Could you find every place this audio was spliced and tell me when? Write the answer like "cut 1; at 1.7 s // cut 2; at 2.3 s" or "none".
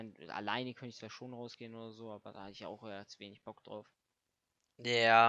none